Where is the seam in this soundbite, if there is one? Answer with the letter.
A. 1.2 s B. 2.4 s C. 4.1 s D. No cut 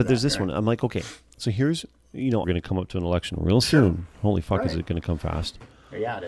B